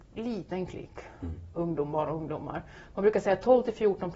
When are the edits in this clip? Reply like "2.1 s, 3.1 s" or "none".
1.5 s